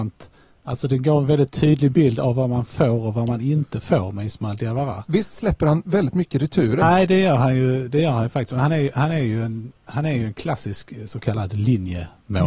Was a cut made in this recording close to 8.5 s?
no; 1 cut; at 6.8 s

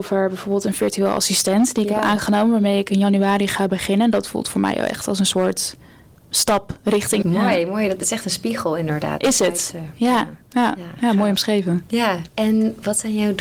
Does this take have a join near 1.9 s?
no; 3 cuts; at 7.2 s, 10.4 s, 12.3 s

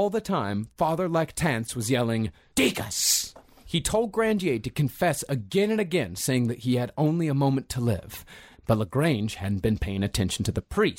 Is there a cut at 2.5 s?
yes; 2 cuts; at 2.5 s, 8.6 s

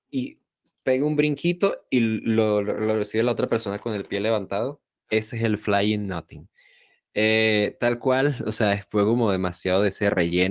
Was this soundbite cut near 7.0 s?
no; 0 cuts

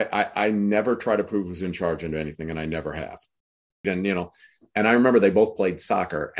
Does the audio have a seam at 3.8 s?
yes; 1 cut; at 3.8 s

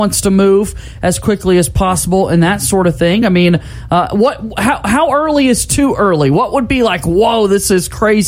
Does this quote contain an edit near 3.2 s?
no; 0 cuts

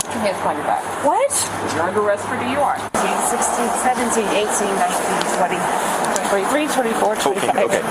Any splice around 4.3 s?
no; 2 cuts; at 2.9 s, 6.2 s

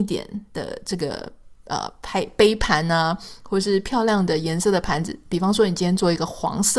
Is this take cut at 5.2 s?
no; 0 cuts

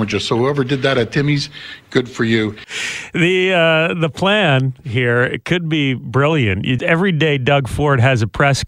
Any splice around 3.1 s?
no; 1 cut; at 6.8 s

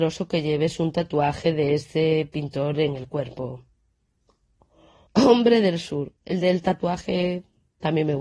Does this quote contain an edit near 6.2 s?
yes; 2 cuts; at 5.1 s, 6.2 s

